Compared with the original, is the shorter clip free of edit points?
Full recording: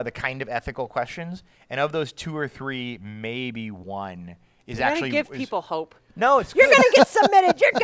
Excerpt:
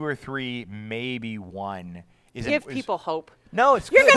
no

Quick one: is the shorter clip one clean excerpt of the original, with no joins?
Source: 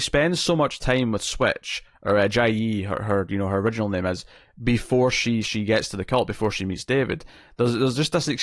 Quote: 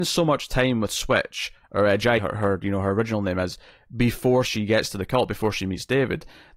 no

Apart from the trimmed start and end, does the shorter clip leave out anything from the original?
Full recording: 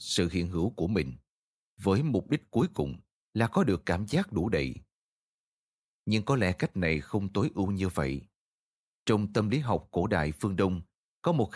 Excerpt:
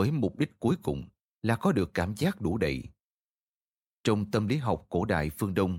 yes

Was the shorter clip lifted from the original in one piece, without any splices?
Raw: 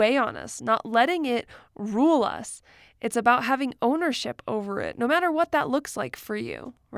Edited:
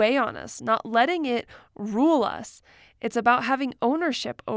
yes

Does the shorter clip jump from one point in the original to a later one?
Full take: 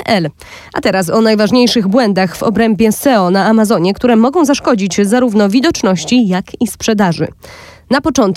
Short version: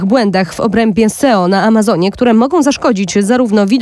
no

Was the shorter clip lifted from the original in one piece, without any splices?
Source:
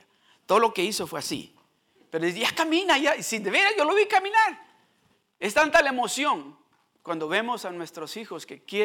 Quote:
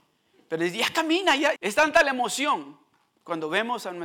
no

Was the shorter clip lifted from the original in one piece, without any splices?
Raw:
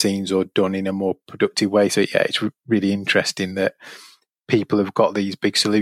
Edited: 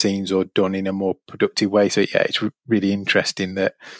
yes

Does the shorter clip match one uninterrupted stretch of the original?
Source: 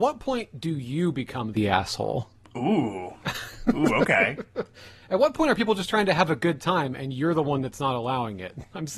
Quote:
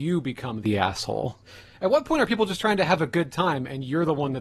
no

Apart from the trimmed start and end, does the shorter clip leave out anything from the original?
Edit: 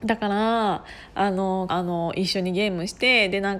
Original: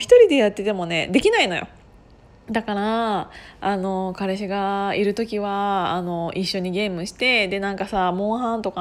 yes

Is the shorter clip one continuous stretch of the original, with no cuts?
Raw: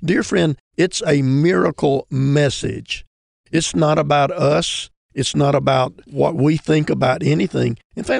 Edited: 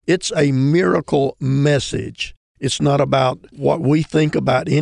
no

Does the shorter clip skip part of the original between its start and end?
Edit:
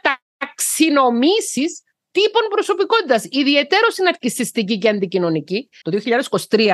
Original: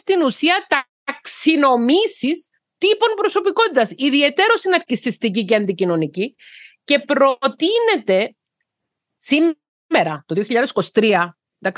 yes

